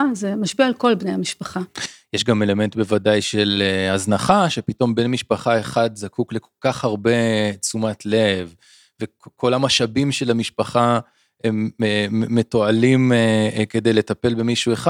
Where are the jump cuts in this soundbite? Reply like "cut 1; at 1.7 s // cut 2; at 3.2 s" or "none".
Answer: none